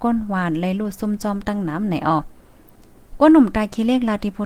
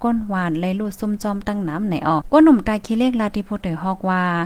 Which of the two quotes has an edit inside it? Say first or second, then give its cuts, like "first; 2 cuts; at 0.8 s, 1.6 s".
second; 1 cut; at 2.2 s